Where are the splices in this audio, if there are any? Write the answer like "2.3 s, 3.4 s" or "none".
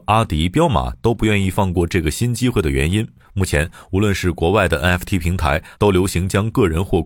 3.2 s, 5.8 s